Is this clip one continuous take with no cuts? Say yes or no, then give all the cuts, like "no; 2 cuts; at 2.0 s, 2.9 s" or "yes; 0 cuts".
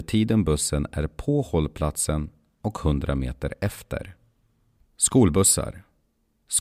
no; 1 cut; at 4.9 s